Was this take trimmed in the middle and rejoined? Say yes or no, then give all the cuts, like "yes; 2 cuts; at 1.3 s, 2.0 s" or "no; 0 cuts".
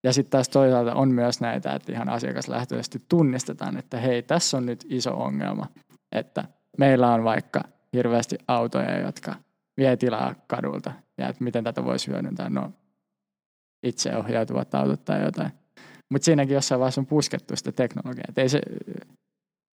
no; 0 cuts